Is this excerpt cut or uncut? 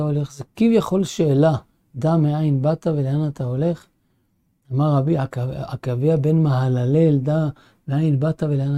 uncut